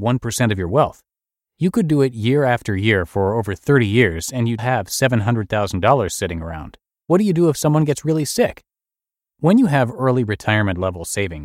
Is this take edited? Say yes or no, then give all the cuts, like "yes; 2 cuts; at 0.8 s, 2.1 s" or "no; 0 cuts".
yes; 2 cuts; at 4.6 s, 7.0 s